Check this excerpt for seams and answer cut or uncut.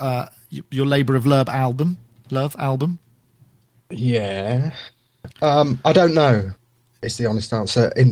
uncut